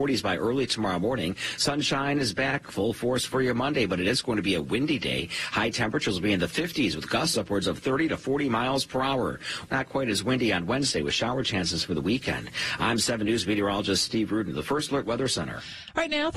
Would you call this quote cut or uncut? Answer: cut